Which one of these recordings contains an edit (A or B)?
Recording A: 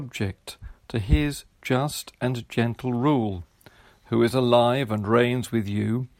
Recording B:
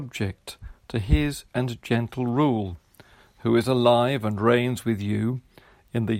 B